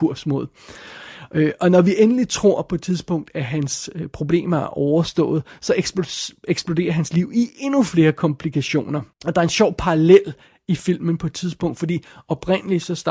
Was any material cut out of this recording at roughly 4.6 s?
no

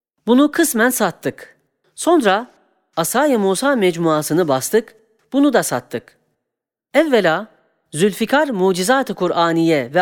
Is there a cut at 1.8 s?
yes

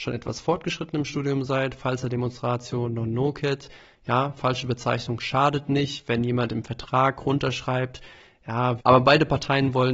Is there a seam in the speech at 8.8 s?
yes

